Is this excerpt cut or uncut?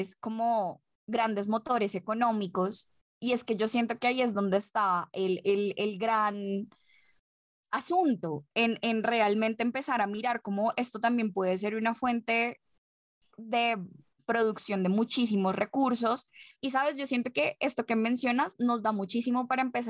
uncut